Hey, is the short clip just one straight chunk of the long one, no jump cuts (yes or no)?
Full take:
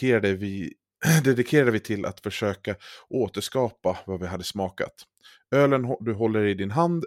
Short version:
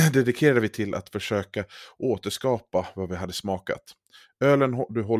yes